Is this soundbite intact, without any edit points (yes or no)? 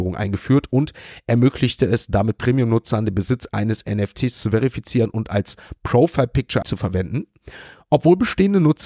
no